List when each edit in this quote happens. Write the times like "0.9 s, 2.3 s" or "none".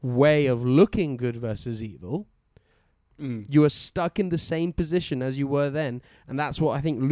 3.1 s